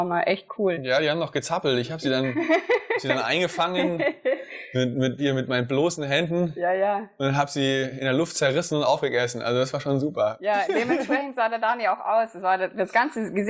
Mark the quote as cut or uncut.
cut